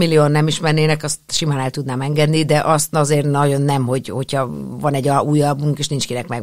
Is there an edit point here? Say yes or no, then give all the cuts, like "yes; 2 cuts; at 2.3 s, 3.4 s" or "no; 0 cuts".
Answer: no; 0 cuts